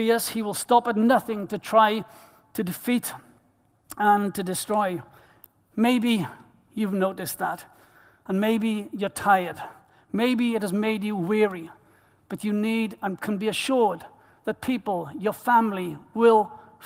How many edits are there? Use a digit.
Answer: 0